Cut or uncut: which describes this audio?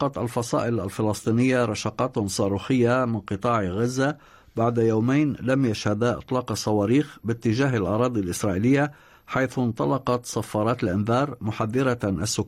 uncut